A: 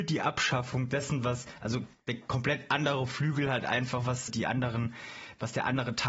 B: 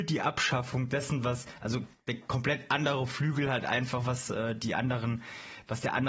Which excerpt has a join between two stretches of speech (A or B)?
A